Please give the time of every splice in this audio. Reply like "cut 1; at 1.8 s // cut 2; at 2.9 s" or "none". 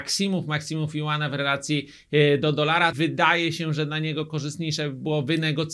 cut 1; at 2.9 s